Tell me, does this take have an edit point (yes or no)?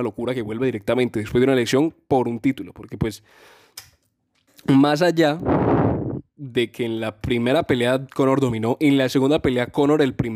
no